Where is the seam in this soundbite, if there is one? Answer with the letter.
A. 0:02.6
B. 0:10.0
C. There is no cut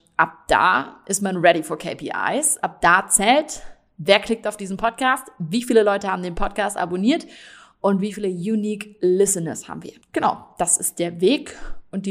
B